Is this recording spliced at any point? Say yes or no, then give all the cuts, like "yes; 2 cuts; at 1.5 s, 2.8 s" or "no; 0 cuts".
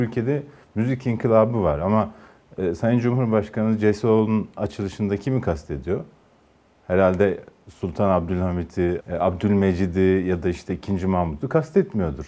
yes; 1 cut; at 9.0 s